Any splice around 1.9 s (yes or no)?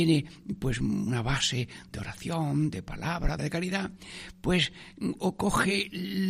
no